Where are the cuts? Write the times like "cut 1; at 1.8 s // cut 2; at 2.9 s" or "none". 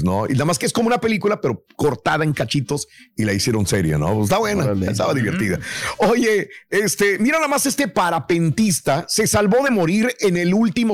none